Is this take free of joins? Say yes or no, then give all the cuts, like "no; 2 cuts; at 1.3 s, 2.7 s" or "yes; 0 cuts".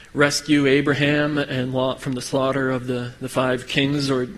yes; 0 cuts